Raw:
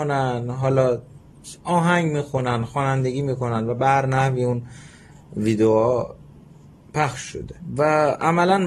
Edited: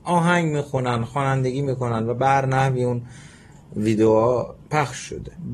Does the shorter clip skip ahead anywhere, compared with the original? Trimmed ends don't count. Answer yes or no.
yes